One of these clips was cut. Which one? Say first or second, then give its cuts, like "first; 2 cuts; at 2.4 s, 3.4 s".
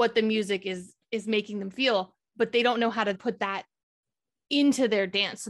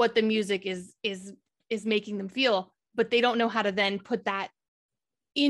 first; 2 cuts; at 1.0 s, 3.1 s